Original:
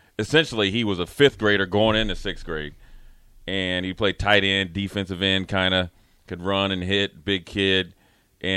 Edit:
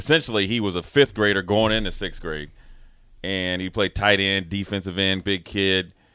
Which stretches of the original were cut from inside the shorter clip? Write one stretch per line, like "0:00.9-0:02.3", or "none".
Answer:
0:05.5-0:07.2

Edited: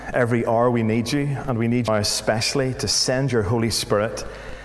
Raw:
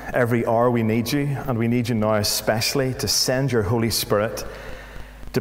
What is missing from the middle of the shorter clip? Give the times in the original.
0:01.9-0:02.1

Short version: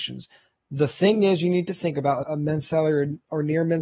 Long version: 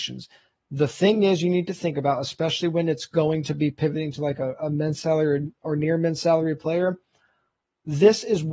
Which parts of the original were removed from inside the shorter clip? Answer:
0:02.2-0:04.6

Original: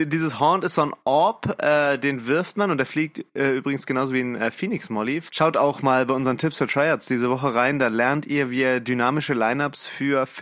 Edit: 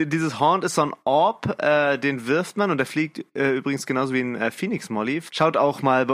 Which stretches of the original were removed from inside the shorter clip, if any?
none

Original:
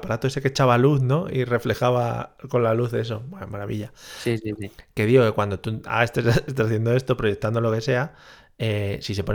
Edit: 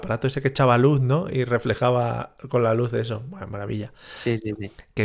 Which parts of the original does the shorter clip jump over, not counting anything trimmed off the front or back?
none

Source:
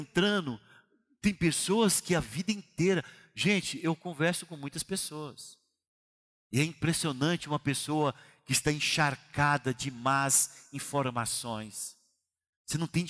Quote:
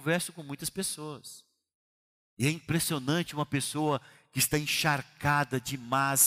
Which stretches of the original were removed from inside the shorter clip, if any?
none

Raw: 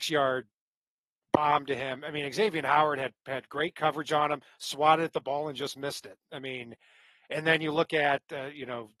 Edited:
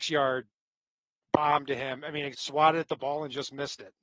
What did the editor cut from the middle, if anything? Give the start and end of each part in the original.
0:02.3-0:04.6

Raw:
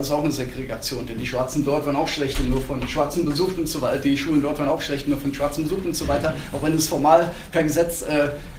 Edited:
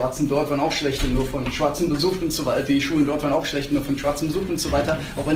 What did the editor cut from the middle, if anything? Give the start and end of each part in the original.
none

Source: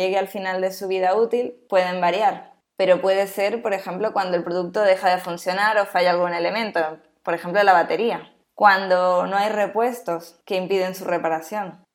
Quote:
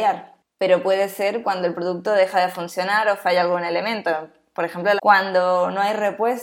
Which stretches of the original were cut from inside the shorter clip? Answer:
0:03.6-0:04.1
0:07.7-0:08.5

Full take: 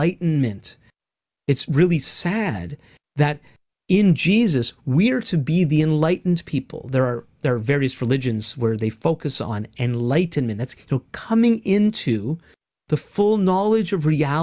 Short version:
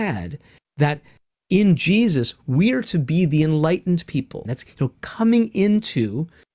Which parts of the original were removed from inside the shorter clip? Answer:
0:06.8-0:10.6

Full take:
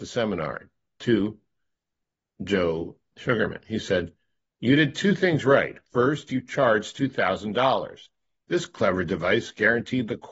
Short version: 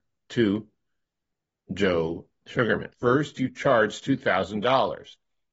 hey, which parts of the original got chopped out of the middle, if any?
0:03.6-0:05.8

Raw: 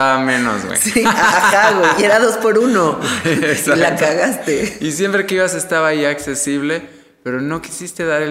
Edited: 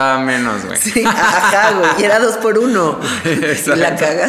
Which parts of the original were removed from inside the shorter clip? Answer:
none

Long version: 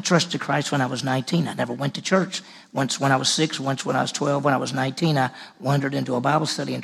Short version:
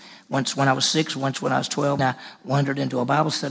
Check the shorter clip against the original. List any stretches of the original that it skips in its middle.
0:04.4-0:05.1

